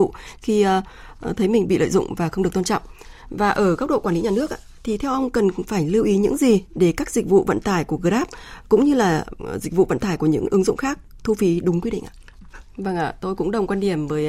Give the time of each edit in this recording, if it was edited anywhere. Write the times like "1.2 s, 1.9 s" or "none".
12.7 s